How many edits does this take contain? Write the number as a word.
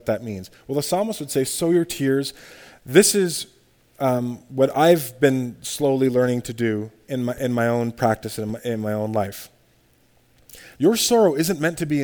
one